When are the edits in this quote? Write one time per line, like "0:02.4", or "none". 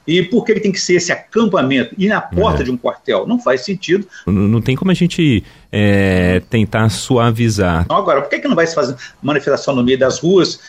0:04.3
0:07.9